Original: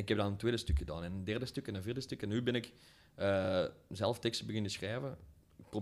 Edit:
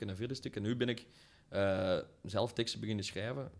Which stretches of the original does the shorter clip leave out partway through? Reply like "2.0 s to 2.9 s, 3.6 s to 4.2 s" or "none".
none

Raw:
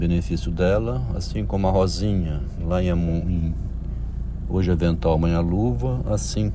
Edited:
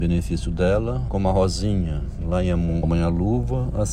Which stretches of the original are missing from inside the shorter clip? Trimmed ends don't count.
1.1 s to 1.5 s, 3.2 s to 5.1 s

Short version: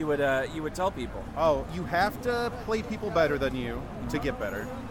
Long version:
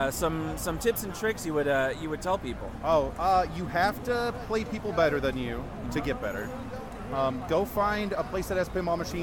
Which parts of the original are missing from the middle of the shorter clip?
3.1 s to 3.5 s

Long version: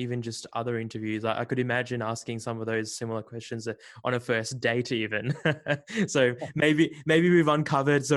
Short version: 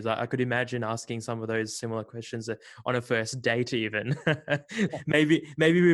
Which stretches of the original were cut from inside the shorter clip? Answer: 6.1 s to 6.4 s

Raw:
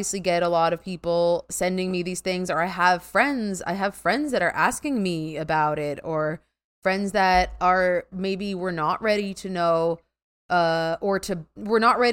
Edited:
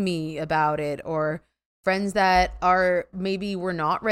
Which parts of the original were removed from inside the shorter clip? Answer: none

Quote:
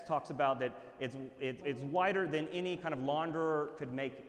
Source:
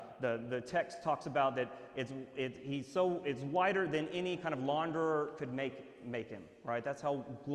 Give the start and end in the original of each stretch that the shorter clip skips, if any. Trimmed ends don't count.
2.6 s to 3.2 s

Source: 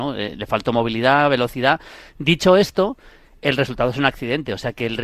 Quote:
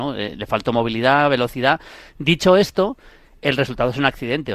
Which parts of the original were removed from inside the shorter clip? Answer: none

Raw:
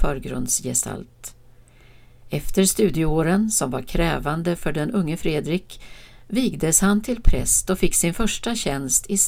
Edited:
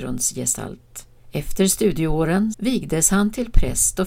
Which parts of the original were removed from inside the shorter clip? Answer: 1.5 s to 2.2 s, 3.5 s to 6.2 s

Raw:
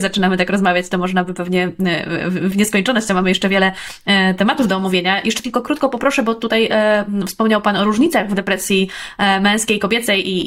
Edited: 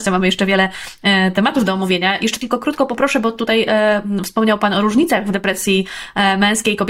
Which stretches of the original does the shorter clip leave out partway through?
none

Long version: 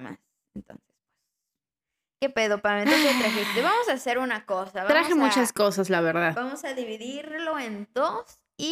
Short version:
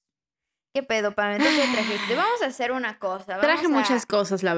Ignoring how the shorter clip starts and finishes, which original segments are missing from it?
none

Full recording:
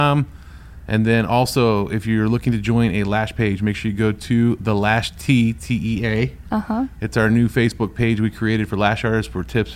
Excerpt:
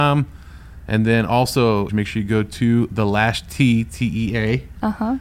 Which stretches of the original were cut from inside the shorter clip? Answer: 1.9 s to 3.6 s

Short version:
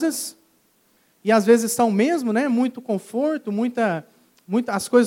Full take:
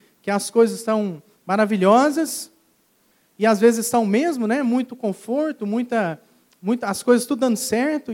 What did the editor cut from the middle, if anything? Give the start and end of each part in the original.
none

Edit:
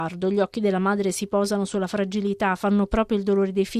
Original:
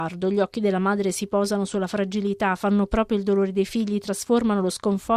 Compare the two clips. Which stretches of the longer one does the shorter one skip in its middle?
none

